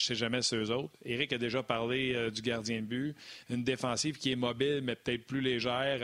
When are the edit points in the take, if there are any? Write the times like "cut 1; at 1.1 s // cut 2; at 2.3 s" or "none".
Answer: none